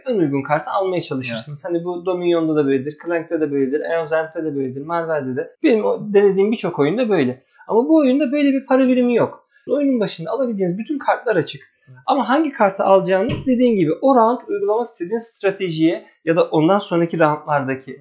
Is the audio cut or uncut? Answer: cut